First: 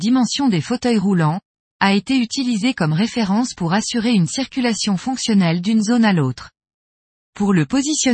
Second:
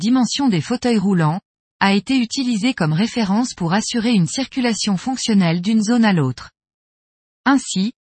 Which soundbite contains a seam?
first; 1 cut; at 7.2 s

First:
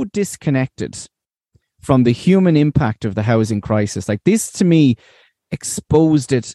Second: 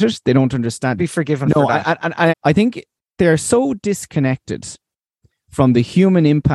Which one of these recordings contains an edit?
second; 2 cuts; at 1.0 s, 2.3 s

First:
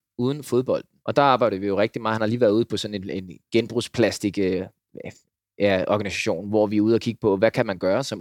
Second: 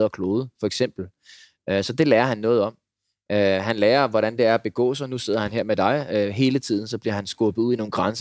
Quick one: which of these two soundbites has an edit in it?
first; 1 cut; at 1.0 s

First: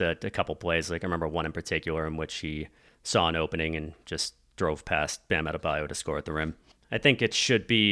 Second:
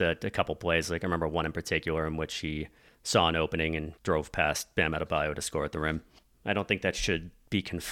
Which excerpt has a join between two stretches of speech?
second; 2 cuts; at 4.0 s, 6.2 s

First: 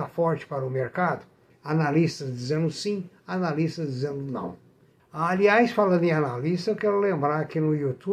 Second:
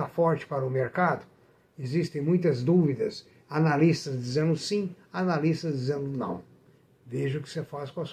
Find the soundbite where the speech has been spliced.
first; 2 cuts; at 1.5 s, 5.0 s

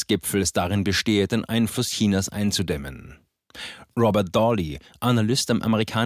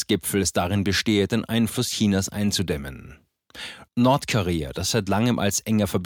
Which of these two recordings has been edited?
second; 1 cut; at 3.9 s

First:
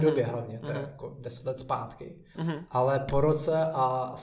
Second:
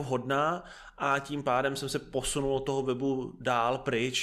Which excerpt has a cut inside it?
first; 1 cut; at 2.3 s

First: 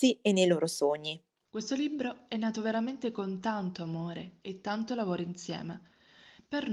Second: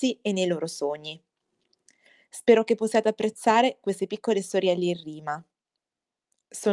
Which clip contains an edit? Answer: first; 1 cut; at 1.5 s

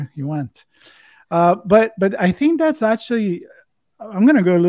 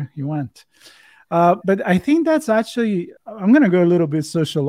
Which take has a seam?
second; 2 cuts; at 1.6 s, 3.2 s

